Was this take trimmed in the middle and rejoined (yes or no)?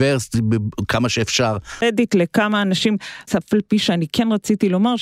yes